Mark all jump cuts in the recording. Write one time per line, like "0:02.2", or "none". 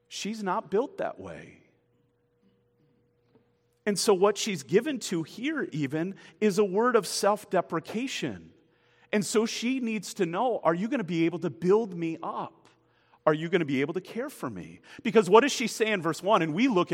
none